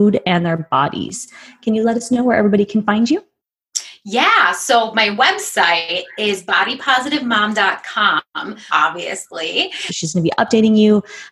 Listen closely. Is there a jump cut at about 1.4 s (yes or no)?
no